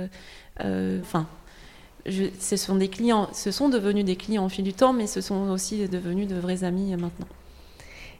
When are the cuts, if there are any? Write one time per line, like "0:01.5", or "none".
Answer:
0:01.0